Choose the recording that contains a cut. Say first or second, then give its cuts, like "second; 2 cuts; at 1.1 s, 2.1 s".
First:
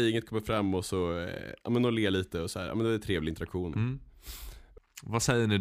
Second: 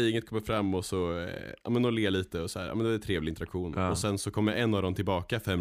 first; 1 cut; at 3.7 s